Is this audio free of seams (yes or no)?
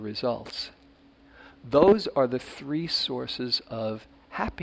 no